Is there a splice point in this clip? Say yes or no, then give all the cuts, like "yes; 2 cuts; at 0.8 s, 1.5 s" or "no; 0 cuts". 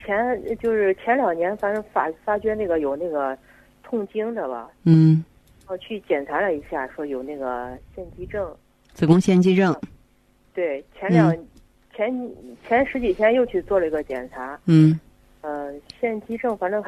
no; 0 cuts